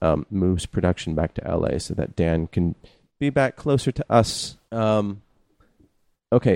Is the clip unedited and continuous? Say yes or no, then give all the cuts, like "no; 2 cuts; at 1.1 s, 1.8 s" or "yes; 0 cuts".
no; 1 cut; at 4.7 s